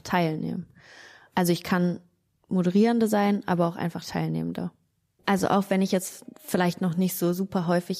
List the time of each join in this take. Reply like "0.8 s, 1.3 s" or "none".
5.2 s